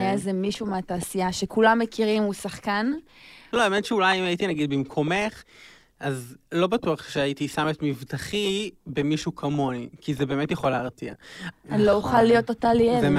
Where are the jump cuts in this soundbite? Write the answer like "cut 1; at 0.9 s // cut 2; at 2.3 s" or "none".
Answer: cut 1; at 3.5 s // cut 2; at 11.5 s

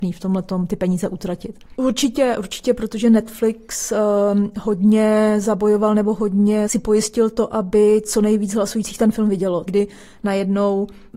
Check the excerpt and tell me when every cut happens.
cut 1; at 1.7 s // cut 2; at 9.7 s

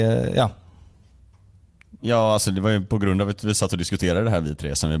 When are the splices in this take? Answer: cut 1; at 2.0 s

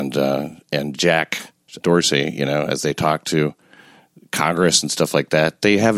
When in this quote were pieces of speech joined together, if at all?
cut 1; at 1.8 s

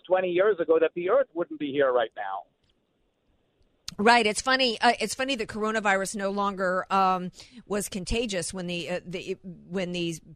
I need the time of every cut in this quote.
none

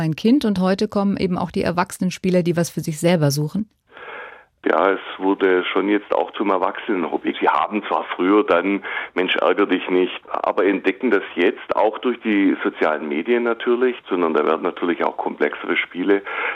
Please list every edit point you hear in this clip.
cut 1; at 7.3 s // cut 2; at 10.2 s // cut 3; at 14.0 s

